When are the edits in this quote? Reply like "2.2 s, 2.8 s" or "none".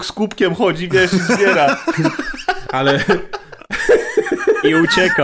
none